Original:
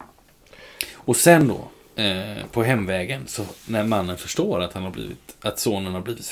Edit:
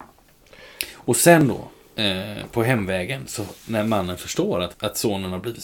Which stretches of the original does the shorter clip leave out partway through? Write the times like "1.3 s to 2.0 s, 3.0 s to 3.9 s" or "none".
4.7 s to 5.4 s